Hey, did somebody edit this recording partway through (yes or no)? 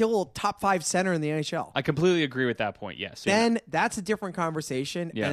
yes